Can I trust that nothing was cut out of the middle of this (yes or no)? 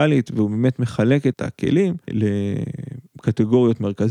no